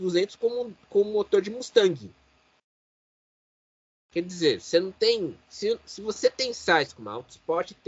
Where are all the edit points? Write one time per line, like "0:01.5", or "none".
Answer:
0:05.4